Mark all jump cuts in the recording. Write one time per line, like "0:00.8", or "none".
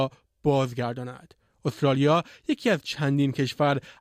none